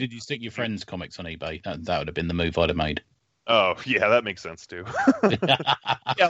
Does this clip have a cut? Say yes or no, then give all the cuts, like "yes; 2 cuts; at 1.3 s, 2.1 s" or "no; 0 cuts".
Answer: no; 0 cuts